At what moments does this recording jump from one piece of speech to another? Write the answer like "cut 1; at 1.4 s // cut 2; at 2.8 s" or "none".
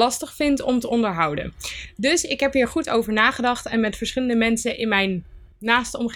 none